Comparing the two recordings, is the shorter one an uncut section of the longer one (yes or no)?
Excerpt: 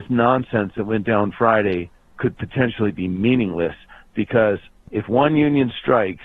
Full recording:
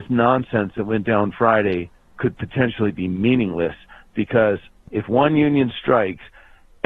yes